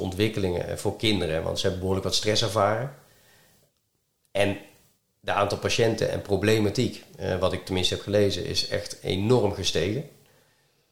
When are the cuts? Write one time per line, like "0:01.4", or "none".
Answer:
none